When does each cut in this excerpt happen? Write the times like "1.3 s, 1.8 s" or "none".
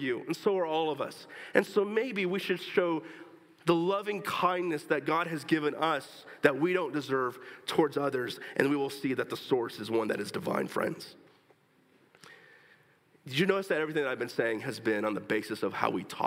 none